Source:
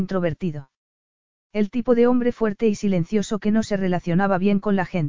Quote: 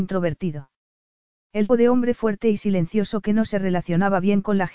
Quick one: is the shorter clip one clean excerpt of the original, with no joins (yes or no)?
no